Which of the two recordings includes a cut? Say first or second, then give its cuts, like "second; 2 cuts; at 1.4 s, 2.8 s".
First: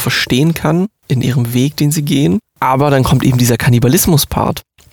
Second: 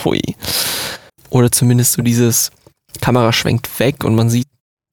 second; 1 cut; at 1.1 s